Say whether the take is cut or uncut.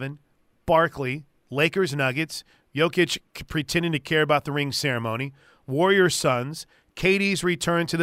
uncut